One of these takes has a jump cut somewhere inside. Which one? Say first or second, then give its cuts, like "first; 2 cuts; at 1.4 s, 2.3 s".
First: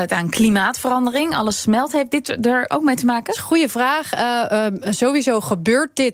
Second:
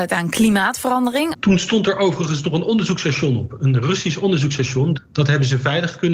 second; 2 cuts; at 1.3 s, 4.9 s